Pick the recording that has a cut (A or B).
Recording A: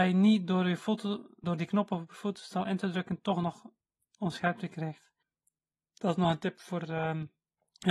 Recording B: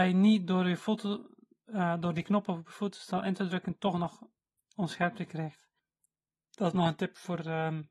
A